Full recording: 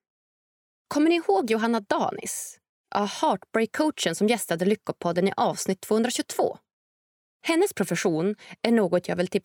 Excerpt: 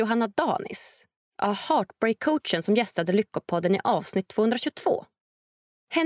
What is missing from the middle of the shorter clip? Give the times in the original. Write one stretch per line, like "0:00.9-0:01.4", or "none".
none